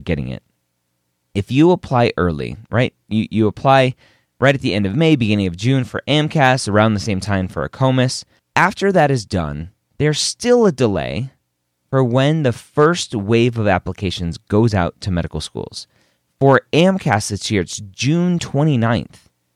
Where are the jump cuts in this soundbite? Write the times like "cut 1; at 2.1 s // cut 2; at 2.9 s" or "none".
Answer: cut 1; at 8.4 s